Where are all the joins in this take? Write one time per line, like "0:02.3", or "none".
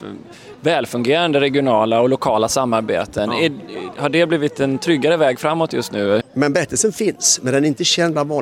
0:06.2